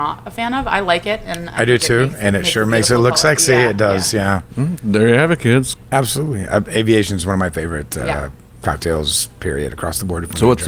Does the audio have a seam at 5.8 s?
yes; 1 cut; at 5.8 s

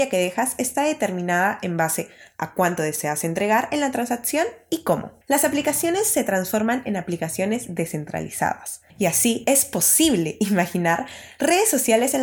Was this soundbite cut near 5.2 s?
yes; 2 cuts; at 5.2 s, 8.9 s

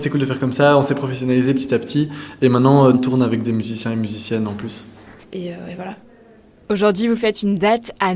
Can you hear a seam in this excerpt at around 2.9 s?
yes; 2 cuts; at 2.9 s, 5.2 s

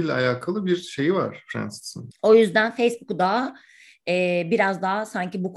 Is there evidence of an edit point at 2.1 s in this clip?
yes; 1 cut; at 2.1 s

